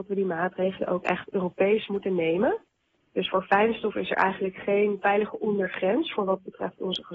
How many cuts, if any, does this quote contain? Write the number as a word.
one